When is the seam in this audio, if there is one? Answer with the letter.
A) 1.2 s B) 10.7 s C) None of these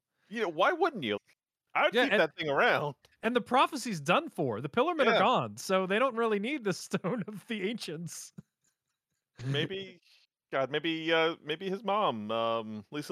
A